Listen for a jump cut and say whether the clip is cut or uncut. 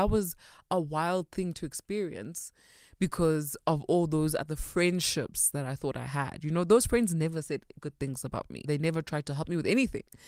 cut